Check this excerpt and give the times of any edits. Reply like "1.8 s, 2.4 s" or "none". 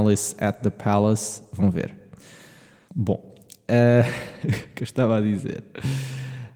2.9 s